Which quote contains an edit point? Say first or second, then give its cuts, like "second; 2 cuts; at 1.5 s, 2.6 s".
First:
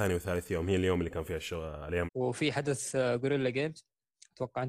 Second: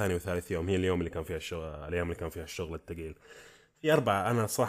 first; 1 cut; at 2.1 s